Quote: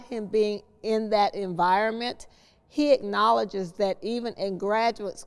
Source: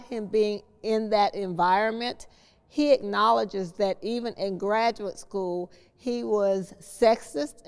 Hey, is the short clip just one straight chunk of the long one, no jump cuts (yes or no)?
yes